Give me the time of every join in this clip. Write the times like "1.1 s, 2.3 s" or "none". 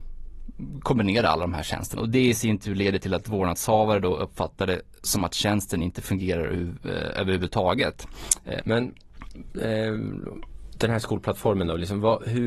2.0 s, 8.6 s